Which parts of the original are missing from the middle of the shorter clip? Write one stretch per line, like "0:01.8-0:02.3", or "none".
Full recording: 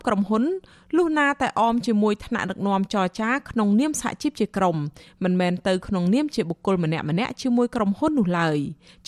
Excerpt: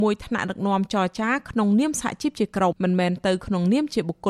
0:04.7-0:05.1